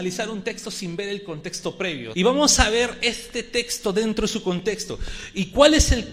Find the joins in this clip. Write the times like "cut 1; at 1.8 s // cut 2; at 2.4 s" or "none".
cut 1; at 2.1 s